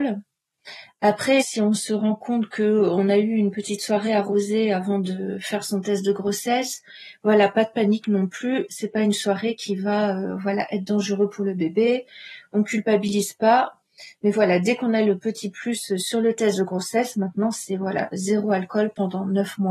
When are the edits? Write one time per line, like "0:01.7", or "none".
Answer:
0:01.4